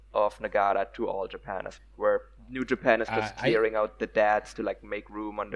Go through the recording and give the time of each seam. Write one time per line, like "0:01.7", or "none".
0:01.8